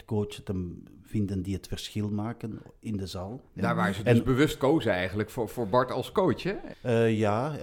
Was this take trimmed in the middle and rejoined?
yes; 1 cut; at 6.7 s

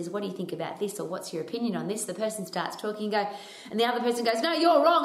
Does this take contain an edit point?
no; 0 cuts

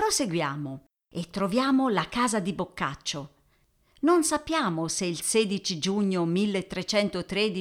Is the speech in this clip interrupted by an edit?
no; 0 cuts

